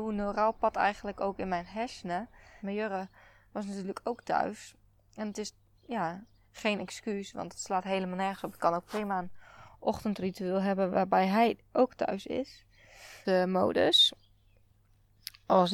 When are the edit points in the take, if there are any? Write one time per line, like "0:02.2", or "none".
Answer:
0:02.6
0:13.2

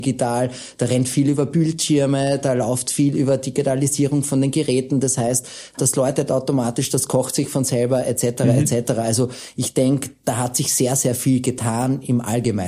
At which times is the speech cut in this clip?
0:05.7

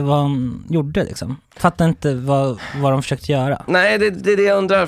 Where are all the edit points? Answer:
none

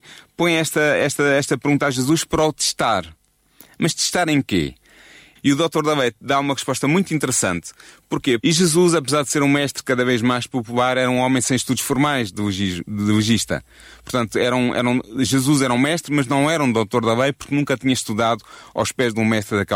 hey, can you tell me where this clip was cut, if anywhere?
0:05.4
0:08.4

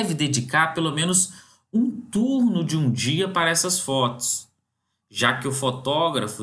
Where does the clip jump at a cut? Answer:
none

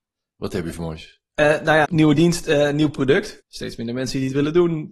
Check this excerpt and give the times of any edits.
0:01.8
0:03.4

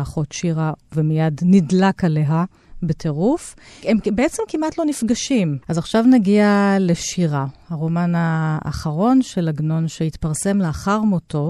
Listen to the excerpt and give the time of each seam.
0:05.6

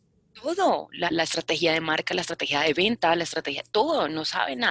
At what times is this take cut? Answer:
0:01.1

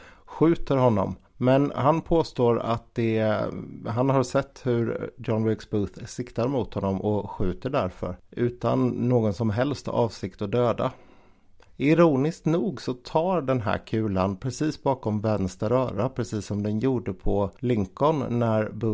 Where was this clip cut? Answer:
0:01.3

